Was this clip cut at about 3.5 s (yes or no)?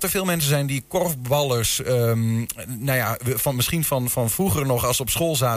no